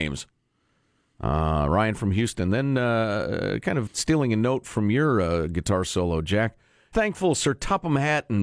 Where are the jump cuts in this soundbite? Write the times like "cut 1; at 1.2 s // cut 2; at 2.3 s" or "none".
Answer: cut 1; at 3.9 s // cut 2; at 6.9 s